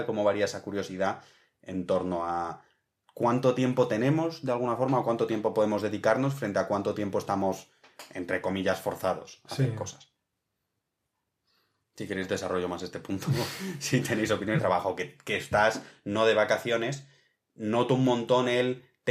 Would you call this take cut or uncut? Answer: cut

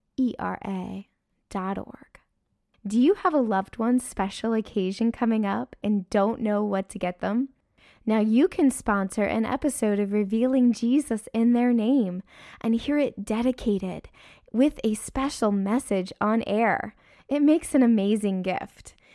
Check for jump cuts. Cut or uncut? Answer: uncut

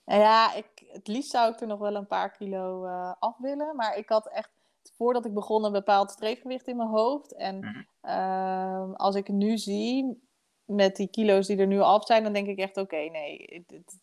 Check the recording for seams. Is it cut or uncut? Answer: uncut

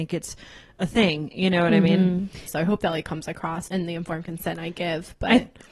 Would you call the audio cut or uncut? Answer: cut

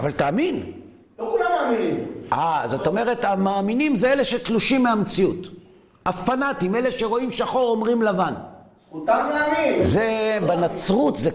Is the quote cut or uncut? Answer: uncut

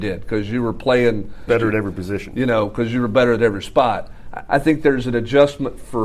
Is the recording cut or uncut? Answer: cut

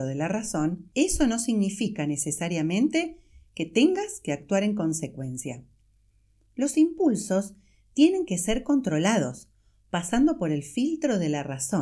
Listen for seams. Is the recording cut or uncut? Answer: uncut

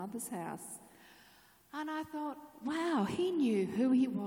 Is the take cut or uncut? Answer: uncut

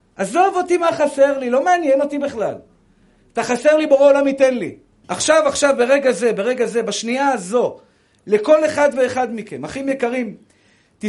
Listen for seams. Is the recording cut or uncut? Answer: cut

